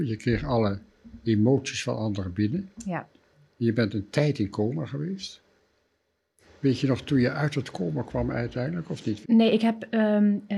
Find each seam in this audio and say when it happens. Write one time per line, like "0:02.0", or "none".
0:09.2